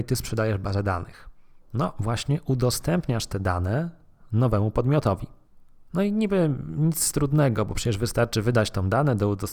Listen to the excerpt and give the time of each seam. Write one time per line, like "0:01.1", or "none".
none